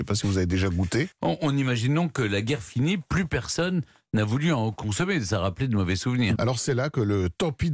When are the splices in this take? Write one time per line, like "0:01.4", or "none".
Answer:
0:01.1
0:06.4